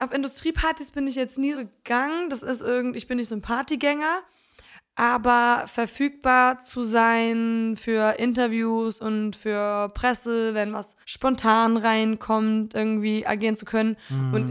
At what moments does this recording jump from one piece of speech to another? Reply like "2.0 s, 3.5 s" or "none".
1.5 s, 11.0 s